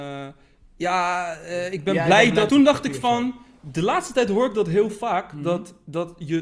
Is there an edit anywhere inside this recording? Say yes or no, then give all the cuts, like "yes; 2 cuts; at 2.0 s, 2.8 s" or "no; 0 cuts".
yes; 1 cut; at 2.5 s